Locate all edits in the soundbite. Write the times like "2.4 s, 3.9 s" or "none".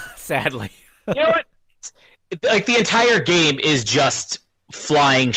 none